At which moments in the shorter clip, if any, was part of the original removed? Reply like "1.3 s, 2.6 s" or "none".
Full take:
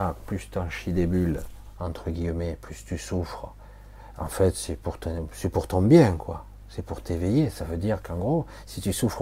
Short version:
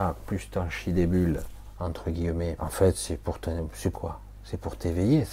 2.6 s, 3.9 s